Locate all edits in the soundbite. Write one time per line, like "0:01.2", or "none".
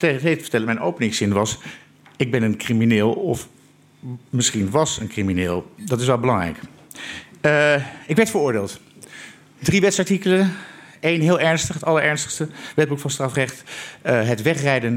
none